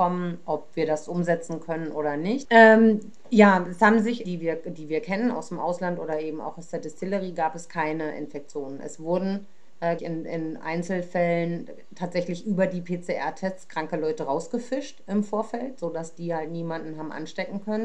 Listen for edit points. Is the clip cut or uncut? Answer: cut